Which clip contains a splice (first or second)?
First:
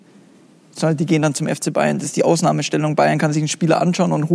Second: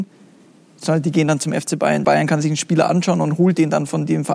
second